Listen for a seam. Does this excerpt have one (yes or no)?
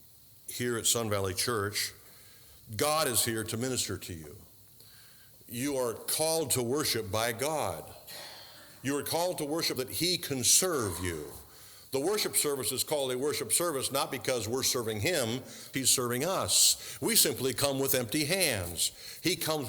yes